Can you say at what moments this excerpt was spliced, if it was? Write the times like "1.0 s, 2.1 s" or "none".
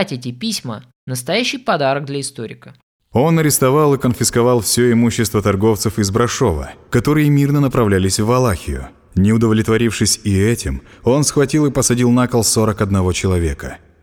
none